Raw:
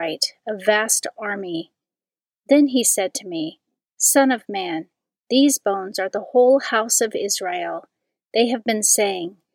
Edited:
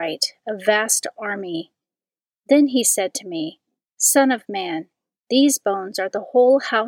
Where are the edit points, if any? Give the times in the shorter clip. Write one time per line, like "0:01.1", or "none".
none